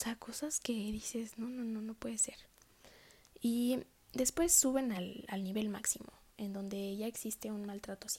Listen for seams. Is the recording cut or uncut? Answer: uncut